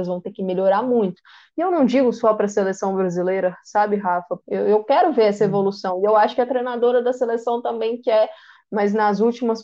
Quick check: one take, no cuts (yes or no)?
no